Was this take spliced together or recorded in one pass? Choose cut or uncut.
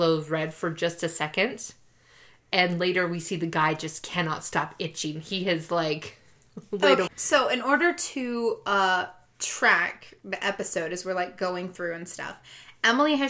cut